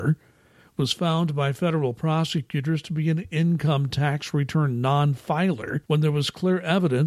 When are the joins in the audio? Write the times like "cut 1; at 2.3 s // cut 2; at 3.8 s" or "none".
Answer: cut 1; at 5.8 s